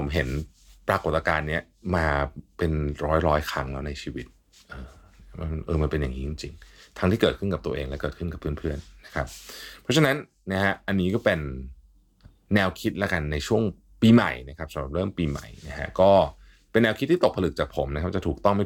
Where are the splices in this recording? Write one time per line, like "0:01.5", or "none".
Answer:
none